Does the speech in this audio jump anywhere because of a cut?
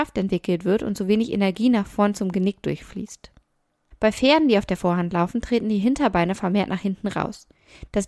yes; 1 cut; at 3.9 s

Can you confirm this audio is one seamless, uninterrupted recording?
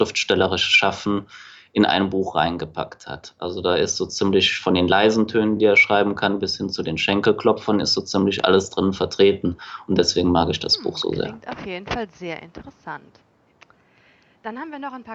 yes; 0 cuts

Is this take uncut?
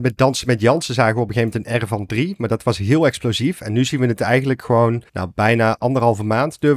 no; 1 cut; at 5.1 s

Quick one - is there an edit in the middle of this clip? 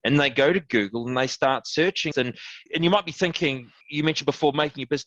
yes; 1 cut; at 2.1 s

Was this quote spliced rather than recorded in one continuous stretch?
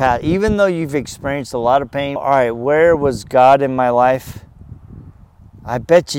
yes; 1 cut; at 2.2 s

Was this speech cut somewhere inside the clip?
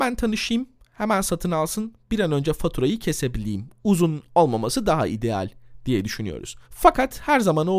yes; 1 cut; at 6.6 s

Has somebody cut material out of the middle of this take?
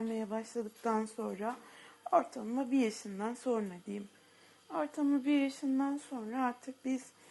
yes; 1 cut; at 4.6 s

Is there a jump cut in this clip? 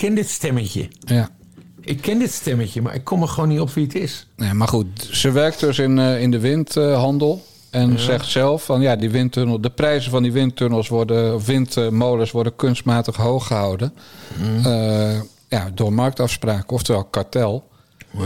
no; 0 cuts

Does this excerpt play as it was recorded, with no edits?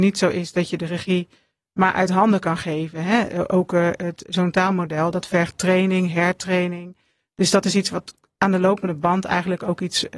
yes; 0 cuts

